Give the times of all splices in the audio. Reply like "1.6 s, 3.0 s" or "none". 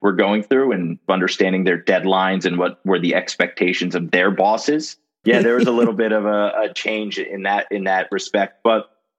5.2 s